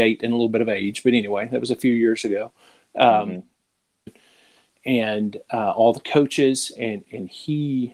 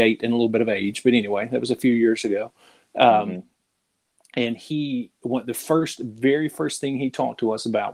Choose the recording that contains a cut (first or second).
first